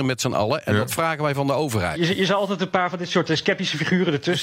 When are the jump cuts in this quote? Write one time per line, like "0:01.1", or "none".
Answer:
0:01.9